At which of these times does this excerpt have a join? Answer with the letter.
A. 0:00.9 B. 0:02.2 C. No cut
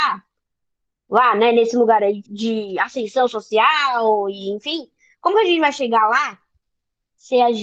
B